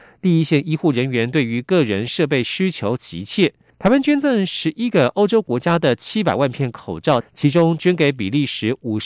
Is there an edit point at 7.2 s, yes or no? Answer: yes